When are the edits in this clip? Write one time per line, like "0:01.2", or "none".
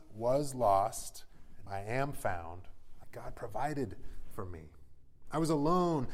0:01.7
0:03.0

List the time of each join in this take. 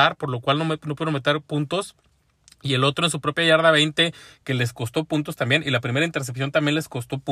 none

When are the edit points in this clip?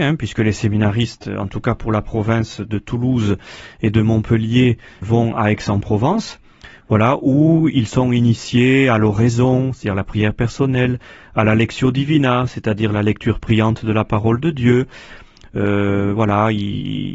0:05.0

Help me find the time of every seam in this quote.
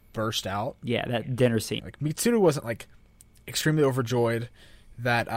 0:01.8

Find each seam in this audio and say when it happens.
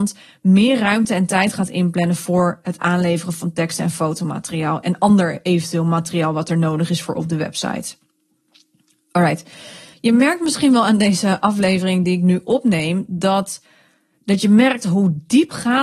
0:09.9

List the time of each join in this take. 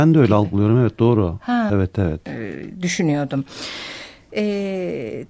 0:01.7
0:04.3

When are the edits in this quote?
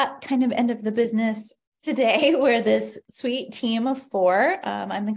0:01.7

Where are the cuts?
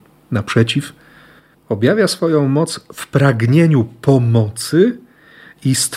none

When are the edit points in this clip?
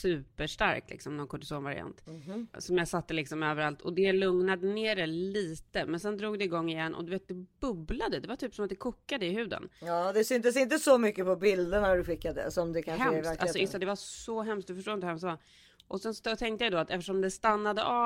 none

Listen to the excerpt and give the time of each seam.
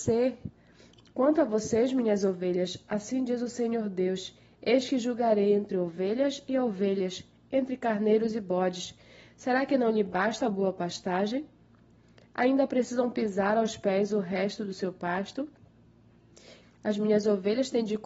0:16.6

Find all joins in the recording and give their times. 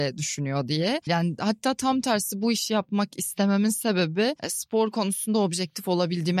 0:01.1
0:04.4

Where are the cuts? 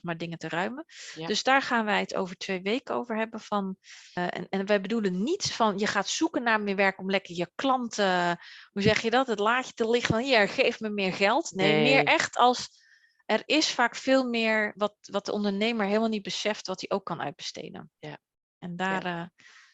0:04.2

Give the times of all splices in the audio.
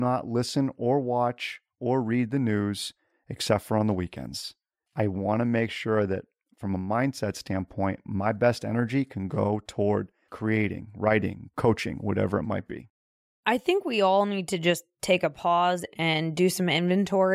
none

